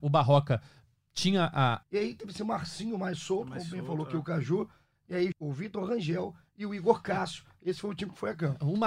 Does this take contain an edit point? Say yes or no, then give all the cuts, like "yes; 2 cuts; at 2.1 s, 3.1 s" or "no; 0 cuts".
yes; 2 cuts; at 1.8 s, 5.3 s